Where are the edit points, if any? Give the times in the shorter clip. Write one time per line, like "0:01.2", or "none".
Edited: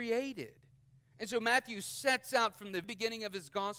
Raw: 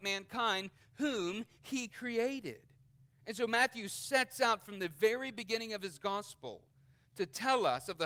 0:02.8

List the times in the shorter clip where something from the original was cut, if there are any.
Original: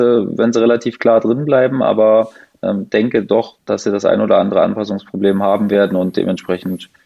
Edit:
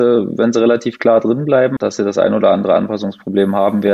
0:01.8

